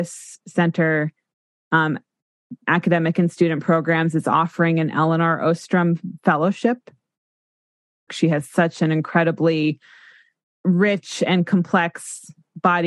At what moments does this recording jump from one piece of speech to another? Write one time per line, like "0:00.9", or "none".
0:08.1
0:10.5